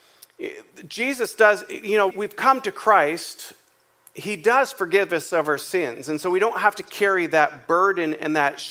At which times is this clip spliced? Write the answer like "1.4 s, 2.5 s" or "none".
2.1 s